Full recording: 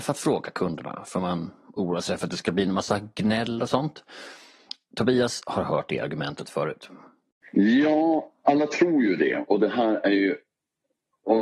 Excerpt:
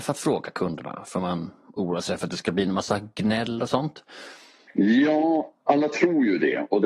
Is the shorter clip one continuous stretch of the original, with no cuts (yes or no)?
no